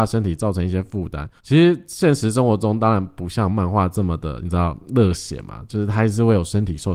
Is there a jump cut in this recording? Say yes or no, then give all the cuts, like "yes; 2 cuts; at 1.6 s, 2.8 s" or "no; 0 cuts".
yes; 1 cut; at 1.4 s